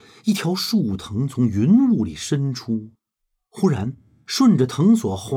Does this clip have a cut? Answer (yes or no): no